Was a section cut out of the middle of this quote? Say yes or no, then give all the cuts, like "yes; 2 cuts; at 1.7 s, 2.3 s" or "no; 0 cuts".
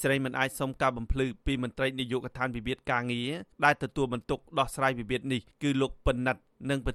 yes; 2 cuts; at 3.5 s, 5.5 s